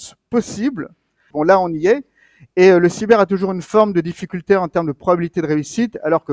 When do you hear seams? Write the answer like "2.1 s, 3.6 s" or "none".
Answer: 1.3 s